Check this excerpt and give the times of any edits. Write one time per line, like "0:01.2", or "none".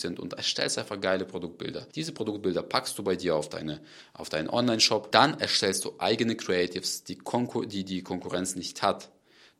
none

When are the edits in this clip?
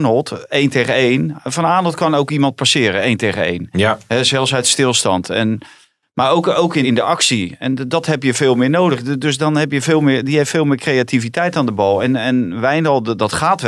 0:06.8

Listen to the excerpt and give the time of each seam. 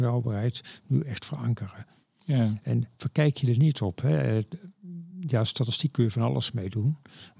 none

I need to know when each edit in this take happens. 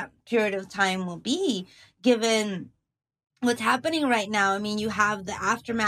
none

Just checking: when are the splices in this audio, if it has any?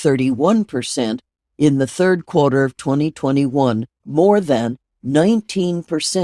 0:04.0

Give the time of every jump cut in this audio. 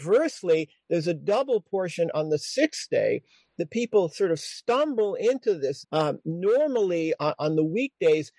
0:05.8
0:07.2

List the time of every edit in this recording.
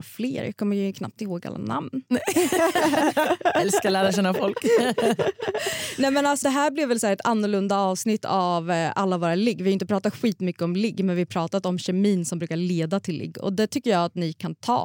0:06.4

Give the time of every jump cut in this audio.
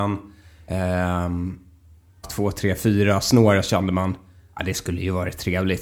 0:02.2

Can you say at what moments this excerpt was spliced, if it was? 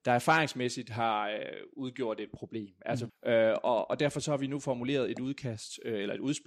0:03.1

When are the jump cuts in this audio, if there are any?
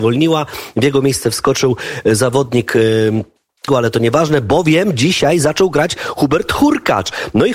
0:03.7

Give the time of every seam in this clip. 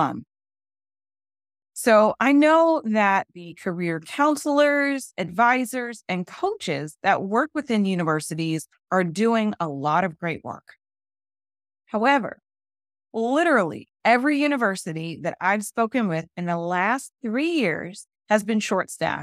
0:01.6

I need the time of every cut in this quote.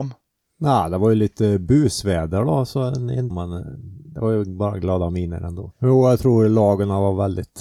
0:03.3
0:05.7

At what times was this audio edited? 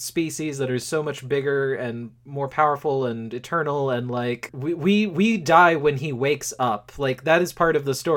none

